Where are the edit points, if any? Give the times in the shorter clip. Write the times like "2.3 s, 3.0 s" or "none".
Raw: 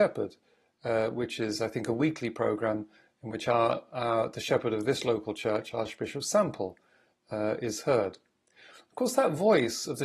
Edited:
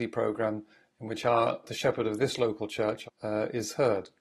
1.6 s, 3.1 s